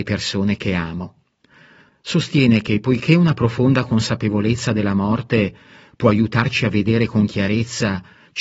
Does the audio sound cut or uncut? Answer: cut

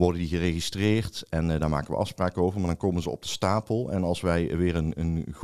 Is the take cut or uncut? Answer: uncut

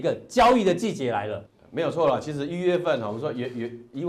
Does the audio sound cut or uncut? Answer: cut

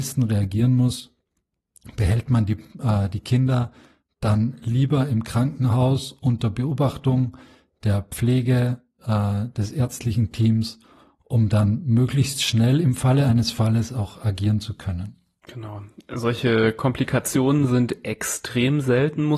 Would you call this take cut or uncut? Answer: uncut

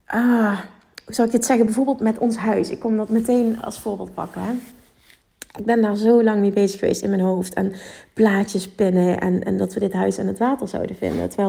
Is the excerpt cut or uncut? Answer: uncut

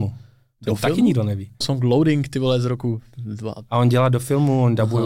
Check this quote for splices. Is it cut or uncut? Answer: cut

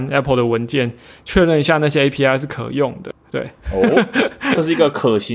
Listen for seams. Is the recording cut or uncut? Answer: uncut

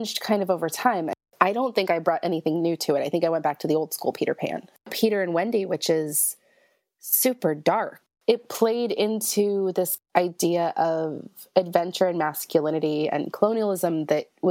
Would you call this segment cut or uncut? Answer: uncut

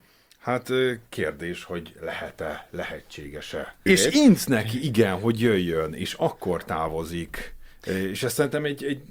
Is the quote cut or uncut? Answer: cut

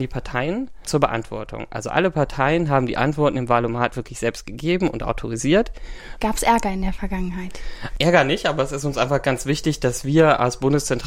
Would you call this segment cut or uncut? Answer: cut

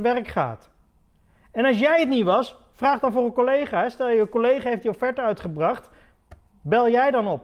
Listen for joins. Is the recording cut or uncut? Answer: uncut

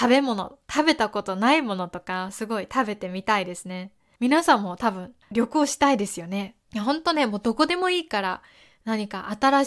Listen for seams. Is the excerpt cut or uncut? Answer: cut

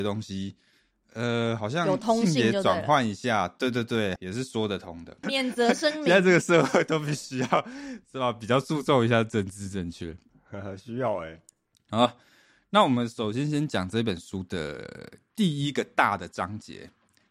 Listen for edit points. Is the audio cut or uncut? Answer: cut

